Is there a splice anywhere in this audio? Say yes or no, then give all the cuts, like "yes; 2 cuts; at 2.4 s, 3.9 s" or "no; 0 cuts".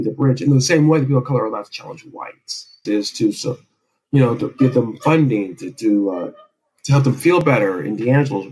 yes; 1 cut; at 2.9 s